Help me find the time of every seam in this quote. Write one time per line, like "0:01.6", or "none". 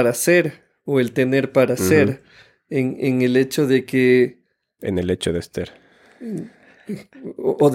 none